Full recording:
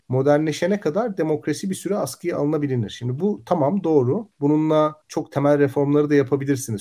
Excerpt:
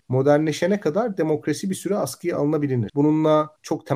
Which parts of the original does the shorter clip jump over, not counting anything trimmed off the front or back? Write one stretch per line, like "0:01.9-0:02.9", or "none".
0:02.9-0:04.3